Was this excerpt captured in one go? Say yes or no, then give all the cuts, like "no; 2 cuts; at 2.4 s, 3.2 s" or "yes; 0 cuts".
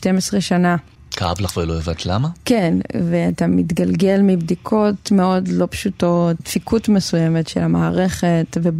yes; 0 cuts